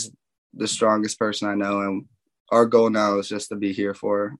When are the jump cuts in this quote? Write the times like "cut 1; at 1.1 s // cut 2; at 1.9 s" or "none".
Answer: none

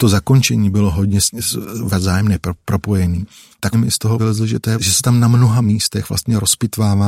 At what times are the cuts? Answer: none

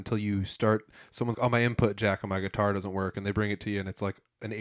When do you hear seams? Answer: cut 1; at 1.3 s

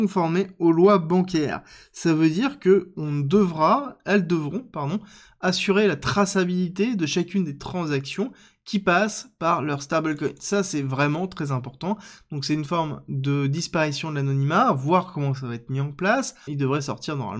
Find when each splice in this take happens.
cut 1; at 16.5 s

